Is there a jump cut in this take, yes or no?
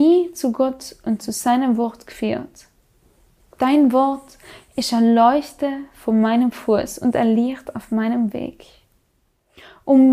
yes